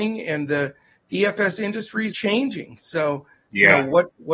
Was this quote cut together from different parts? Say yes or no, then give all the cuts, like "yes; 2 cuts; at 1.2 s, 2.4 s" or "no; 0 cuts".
yes; 1 cut; at 2.1 s